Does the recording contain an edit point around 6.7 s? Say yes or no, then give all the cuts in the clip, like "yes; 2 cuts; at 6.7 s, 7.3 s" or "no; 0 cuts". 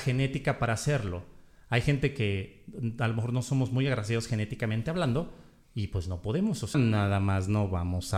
yes; 1 cut; at 6.7 s